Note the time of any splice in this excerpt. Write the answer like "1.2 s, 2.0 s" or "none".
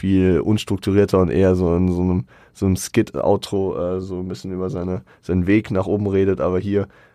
none